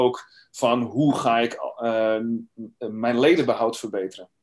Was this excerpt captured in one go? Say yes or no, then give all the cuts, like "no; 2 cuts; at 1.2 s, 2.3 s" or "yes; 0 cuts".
yes; 0 cuts